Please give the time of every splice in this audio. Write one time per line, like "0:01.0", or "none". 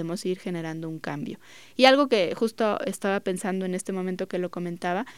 none